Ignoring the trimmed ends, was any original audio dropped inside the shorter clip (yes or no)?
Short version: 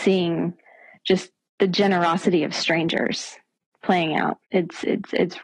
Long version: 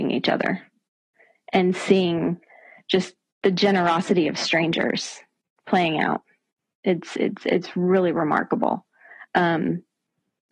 yes